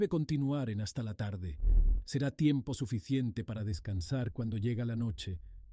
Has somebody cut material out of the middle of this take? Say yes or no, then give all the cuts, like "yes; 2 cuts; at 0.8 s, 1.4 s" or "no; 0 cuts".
no; 0 cuts